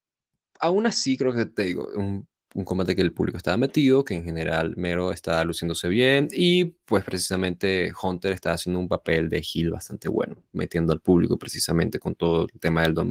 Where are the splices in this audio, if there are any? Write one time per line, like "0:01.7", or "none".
none